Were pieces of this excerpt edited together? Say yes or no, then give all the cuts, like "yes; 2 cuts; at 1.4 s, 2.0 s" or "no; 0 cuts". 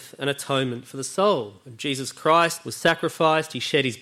no; 0 cuts